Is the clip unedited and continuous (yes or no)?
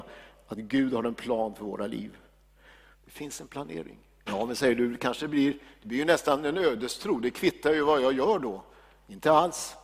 no